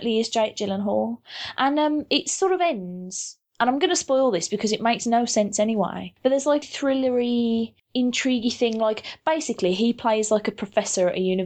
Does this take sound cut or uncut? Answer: cut